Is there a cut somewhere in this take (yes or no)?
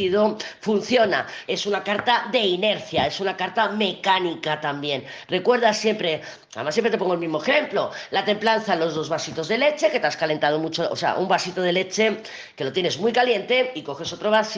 yes